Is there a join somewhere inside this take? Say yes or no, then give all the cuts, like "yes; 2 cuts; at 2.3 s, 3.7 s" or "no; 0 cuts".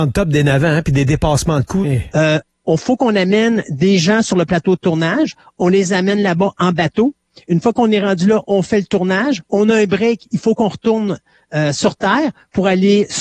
yes; 1 cut; at 1.8 s